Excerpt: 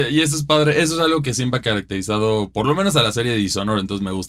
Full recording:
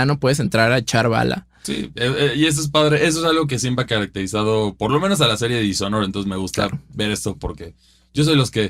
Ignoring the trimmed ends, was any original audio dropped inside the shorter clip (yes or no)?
no